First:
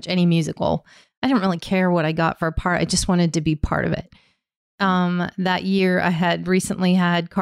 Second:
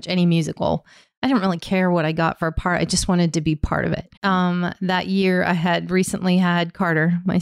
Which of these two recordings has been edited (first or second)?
second